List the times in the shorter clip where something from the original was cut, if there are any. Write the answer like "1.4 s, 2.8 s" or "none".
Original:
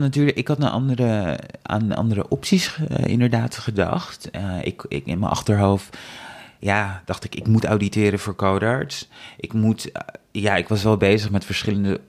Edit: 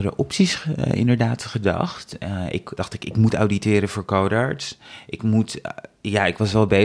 2.7 s